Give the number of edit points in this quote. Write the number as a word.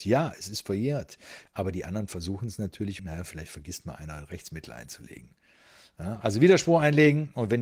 two